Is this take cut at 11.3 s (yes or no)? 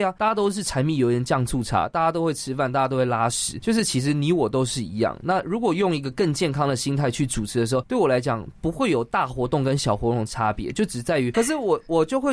yes